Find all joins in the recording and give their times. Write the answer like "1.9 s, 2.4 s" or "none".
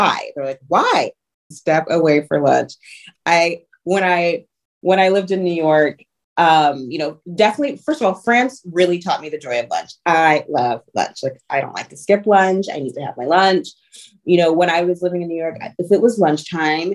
1.5 s